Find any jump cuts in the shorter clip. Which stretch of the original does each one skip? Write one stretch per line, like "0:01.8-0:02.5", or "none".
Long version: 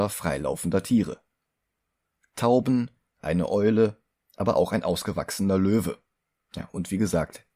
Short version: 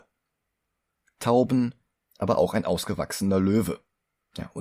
0:03.1-0:04.2